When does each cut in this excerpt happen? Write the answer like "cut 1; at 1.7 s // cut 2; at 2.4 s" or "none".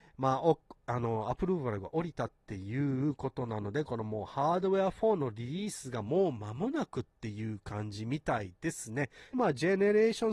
cut 1; at 9.3 s